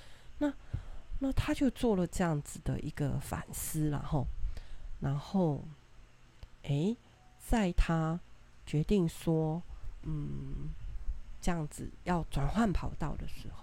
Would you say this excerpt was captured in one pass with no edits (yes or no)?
yes